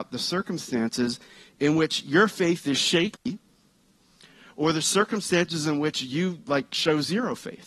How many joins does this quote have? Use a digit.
0